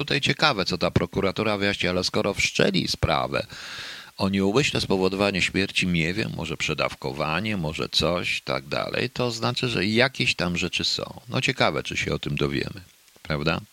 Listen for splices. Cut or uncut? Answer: uncut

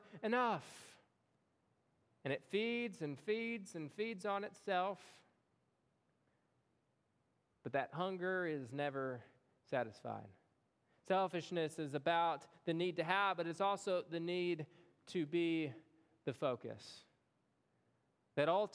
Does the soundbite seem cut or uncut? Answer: uncut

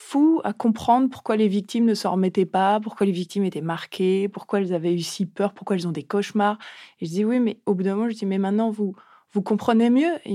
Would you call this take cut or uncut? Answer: uncut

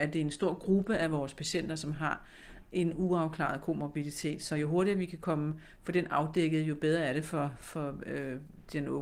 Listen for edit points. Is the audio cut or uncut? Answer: uncut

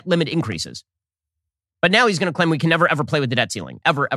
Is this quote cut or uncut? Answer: uncut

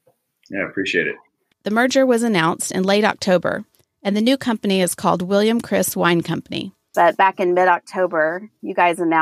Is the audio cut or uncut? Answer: cut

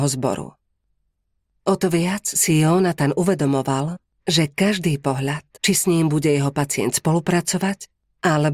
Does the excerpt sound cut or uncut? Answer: cut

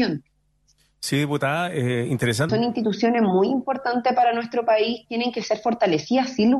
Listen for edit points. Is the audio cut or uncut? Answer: cut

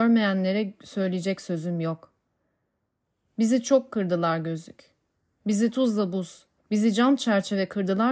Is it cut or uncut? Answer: cut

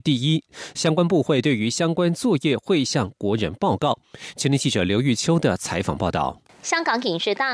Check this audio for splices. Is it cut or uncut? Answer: uncut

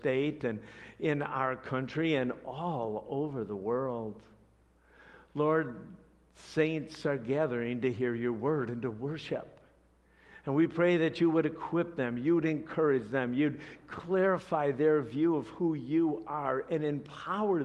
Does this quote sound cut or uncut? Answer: uncut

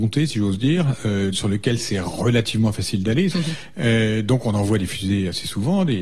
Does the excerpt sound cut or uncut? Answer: cut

